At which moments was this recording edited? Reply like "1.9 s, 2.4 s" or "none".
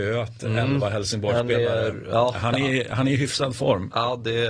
none